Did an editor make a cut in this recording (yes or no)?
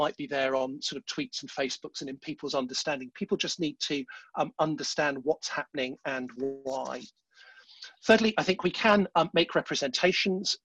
no